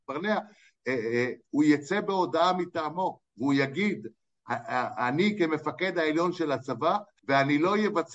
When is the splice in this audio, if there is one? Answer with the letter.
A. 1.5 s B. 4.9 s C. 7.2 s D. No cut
C